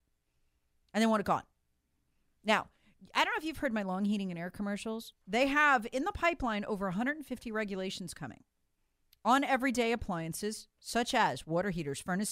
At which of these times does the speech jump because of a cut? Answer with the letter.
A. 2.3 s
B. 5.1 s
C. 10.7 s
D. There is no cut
B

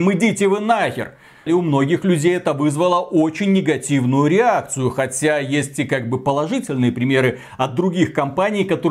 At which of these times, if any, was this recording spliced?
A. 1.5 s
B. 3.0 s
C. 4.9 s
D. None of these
A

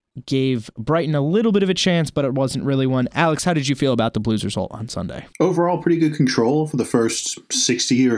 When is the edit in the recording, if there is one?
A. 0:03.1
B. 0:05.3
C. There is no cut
B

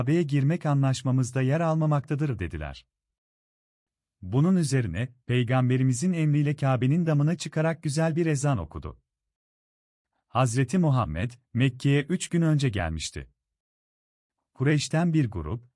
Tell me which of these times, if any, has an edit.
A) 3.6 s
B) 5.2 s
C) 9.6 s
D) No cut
B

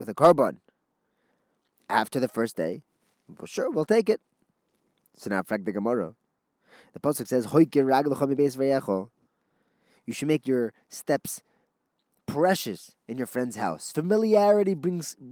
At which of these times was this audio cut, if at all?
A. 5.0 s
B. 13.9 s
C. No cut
C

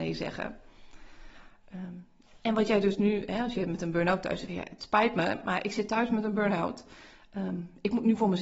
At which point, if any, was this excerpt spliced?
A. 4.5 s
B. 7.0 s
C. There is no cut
A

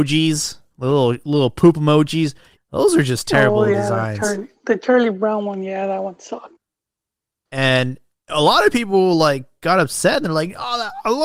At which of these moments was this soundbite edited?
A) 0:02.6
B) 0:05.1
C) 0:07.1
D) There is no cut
A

